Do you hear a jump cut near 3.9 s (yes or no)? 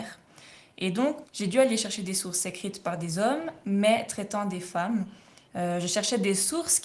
no